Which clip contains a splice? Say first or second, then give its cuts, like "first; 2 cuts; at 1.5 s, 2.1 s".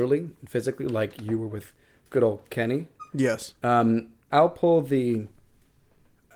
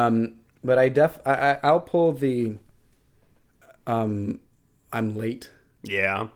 first; 1 cut; at 4.3 s